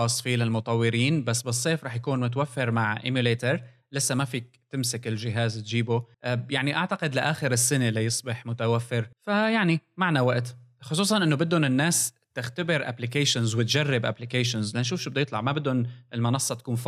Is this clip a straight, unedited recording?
no; 2 cuts; at 6.1 s, 9.1 s

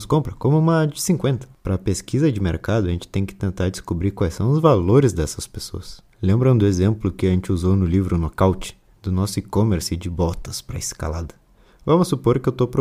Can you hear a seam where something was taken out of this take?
no; 0 cuts

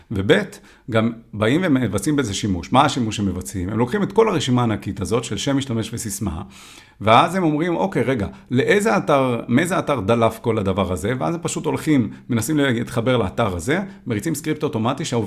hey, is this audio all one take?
yes; 0 cuts

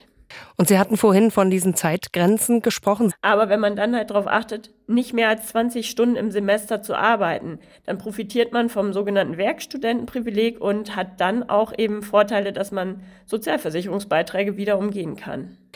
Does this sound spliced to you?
yes; 1 cut; at 3.1 s

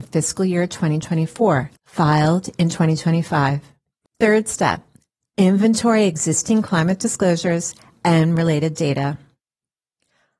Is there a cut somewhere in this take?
yes; 2 cuts; at 1.8 s, 4.1 s

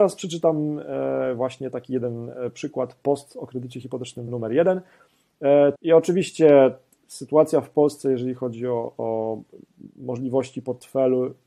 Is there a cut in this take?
yes; 2 cuts; at 4.3 s, 5.8 s

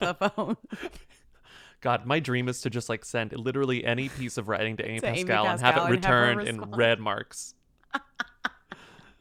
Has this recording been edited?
no; 0 cuts

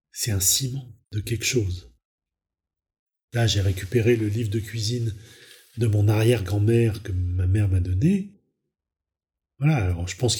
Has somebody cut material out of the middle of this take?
yes; 1 cut; at 1.0 s

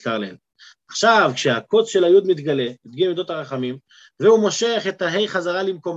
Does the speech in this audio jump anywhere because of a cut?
no; 0 cuts

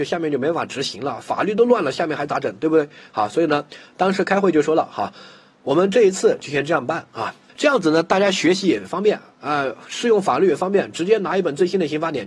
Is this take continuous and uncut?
no; 1 cut; at 7.5 s

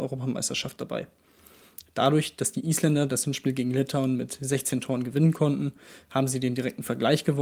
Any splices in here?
no; 0 cuts

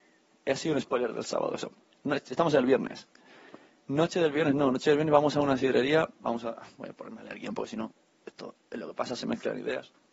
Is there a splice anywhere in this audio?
no; 0 cuts

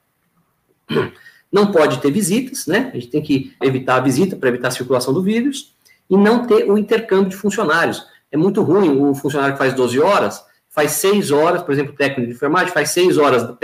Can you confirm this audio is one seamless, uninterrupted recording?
no; 1 cut; at 3.6 s

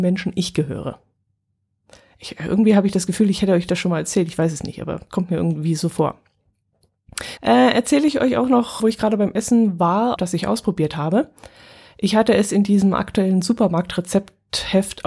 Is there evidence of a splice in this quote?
yes; 3 cuts; at 7.4 s, 8.8 s, 10.2 s

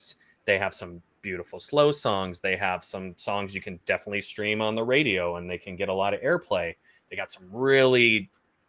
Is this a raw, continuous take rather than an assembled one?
yes; 0 cuts

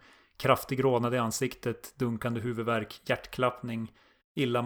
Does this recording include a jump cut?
no; 0 cuts

